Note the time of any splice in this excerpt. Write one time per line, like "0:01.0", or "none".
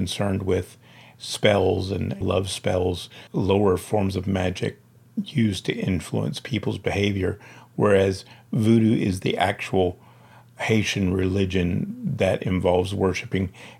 0:02.2
0:03.3